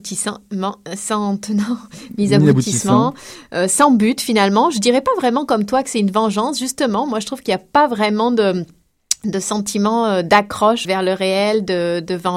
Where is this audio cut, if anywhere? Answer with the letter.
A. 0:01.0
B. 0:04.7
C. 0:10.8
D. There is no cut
C